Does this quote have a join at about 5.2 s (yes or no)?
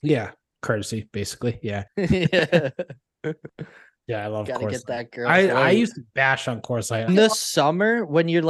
no